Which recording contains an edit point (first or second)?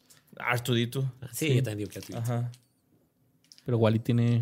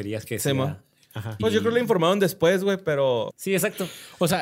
second